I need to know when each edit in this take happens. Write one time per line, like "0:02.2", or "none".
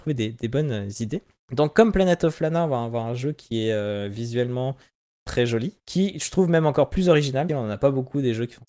0:05.8
0:07.5